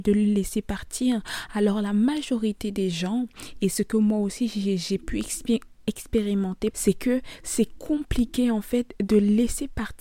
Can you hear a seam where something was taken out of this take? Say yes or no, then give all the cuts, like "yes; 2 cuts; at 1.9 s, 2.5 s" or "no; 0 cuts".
yes; 1 cut; at 6.7 s